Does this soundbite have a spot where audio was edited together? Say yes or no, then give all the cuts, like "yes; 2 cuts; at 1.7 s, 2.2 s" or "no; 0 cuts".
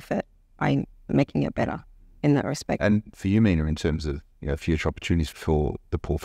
yes; 3 cuts; at 2.8 s, 4.3 s, 5.3 s